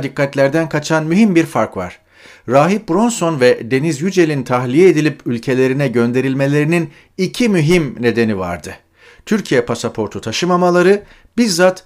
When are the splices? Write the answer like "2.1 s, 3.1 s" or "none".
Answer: none